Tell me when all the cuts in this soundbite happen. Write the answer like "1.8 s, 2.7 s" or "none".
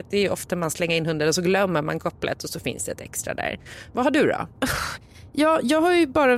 4.5 s